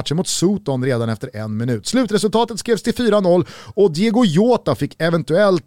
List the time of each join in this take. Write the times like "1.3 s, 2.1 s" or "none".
none